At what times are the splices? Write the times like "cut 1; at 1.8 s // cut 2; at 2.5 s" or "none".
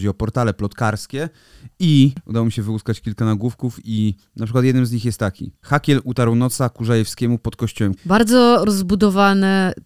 cut 1; at 8.0 s